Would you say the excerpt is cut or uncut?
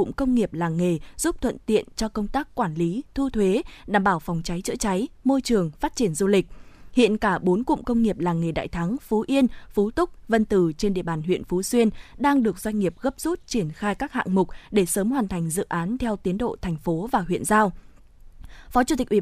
uncut